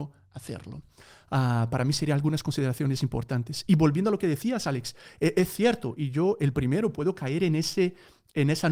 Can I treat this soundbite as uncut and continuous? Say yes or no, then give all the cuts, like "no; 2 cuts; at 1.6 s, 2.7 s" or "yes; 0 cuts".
yes; 0 cuts